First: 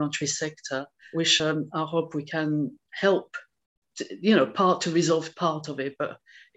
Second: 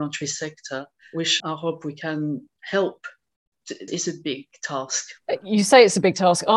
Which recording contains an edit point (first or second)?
second